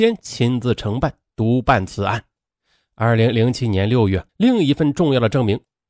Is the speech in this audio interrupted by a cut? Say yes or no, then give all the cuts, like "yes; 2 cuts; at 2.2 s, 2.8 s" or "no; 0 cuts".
yes; 1 cut; at 4.3 s